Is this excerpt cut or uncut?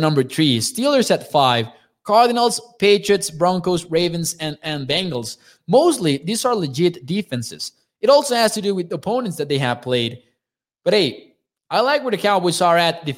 uncut